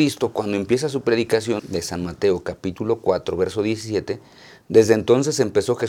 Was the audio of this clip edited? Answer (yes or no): yes